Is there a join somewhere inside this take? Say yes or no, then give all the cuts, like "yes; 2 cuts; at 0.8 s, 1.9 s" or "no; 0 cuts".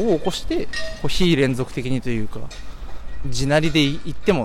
yes; 1 cut; at 3.2 s